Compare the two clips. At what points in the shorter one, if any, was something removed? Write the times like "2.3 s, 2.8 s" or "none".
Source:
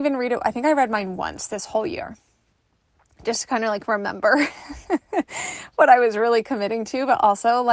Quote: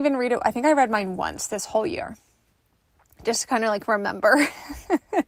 none

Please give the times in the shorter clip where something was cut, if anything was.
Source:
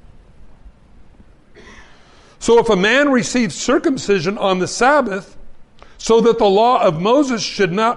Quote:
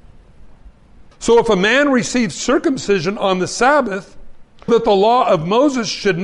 1.1 s, 4.7 s

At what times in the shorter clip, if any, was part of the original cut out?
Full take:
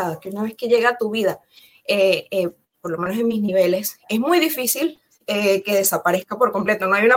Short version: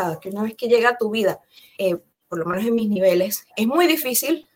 1.8 s

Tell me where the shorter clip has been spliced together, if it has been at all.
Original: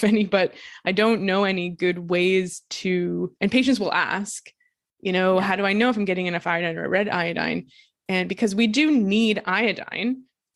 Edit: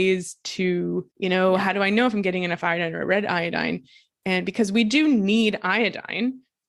1.1 s

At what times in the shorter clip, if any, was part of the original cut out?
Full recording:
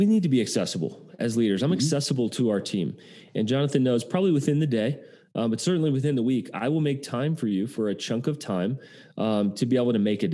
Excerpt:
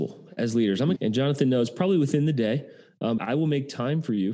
1.0 s, 3.2 s

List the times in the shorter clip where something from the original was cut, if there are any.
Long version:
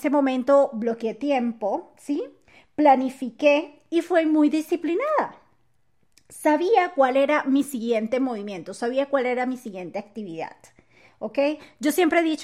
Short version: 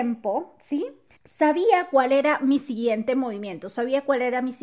1.2 s

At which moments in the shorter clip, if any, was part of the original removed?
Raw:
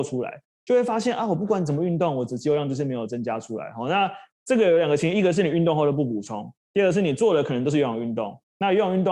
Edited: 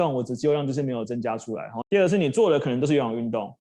1.8 s

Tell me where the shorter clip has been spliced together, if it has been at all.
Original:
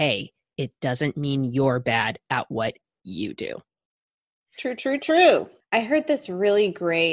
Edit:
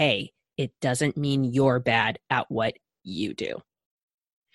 none

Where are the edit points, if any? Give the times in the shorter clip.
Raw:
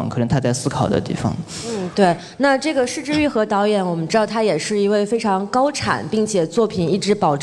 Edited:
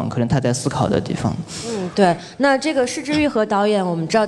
none

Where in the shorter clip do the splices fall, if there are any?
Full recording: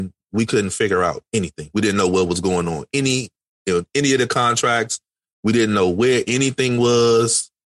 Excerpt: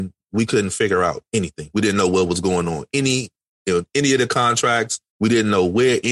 5.1 s

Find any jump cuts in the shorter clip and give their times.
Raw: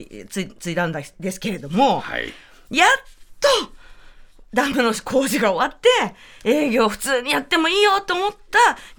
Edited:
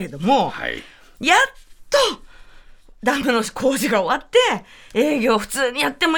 none

